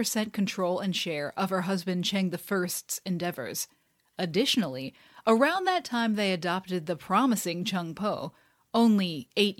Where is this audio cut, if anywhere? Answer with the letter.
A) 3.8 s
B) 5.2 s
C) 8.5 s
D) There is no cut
D